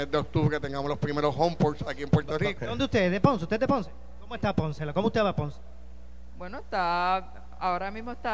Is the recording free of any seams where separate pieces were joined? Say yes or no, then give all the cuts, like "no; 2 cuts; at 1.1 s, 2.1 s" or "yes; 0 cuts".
no; 1 cut; at 2.6 s